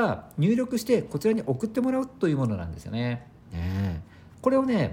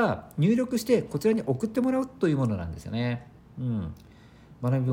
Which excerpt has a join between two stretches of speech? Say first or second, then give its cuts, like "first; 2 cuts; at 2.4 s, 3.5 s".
first; 1 cut; at 3.4 s